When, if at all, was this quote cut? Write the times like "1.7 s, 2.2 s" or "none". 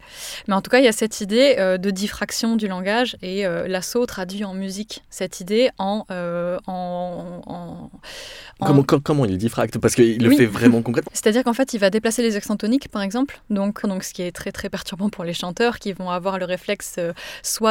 11.0 s, 13.8 s